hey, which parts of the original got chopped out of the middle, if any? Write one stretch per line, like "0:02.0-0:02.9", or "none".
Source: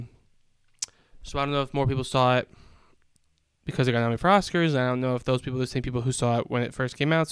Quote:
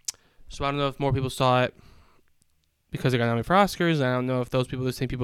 none